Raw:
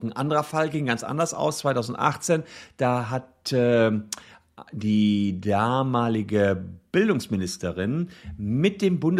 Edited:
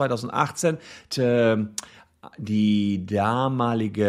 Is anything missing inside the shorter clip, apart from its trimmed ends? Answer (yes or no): yes